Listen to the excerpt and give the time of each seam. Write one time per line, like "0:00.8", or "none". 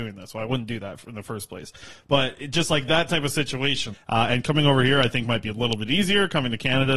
0:03.9